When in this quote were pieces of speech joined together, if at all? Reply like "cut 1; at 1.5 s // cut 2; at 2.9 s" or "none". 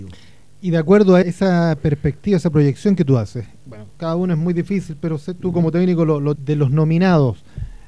cut 1; at 1.2 s // cut 2; at 3.7 s // cut 3; at 6.4 s